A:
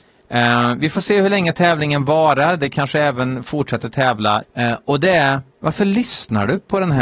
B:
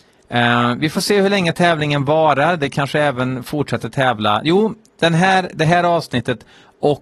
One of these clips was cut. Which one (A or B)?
A